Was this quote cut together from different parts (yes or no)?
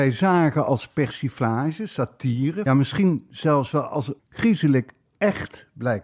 yes